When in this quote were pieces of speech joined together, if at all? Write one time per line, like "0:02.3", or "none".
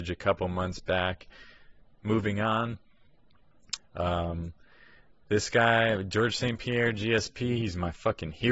0:01.8
0:03.8

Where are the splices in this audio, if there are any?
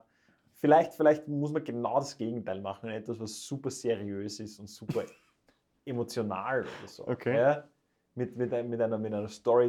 none

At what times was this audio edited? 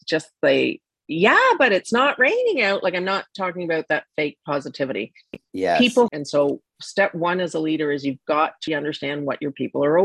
0:06.1
0:08.7

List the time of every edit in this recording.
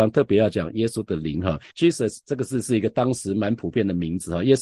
0:01.7

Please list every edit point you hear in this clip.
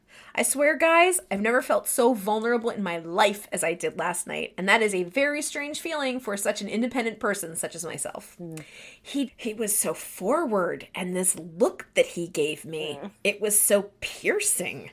0:09.3

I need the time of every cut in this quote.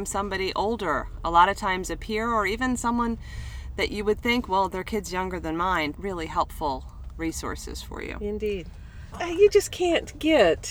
0:05.9
0:09.1

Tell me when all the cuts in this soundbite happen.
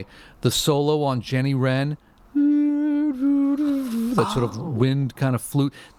0:04.5

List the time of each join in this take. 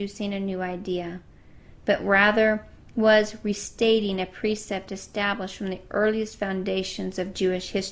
none

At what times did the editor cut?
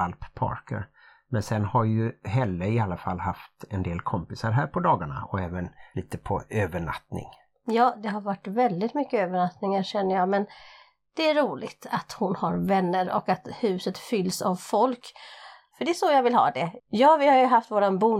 0:16.8

